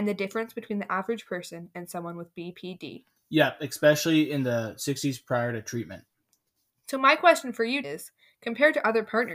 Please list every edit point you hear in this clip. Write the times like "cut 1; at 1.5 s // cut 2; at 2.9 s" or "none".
cut 1; at 7.8 s